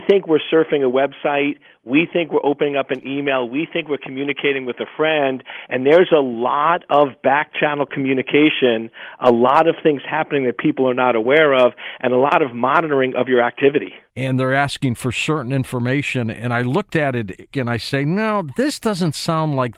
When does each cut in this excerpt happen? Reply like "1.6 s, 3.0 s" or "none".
14.1 s, 17.5 s